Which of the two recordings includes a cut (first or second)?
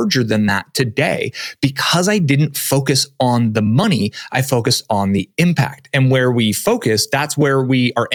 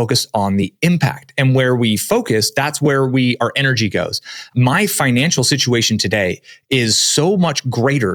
second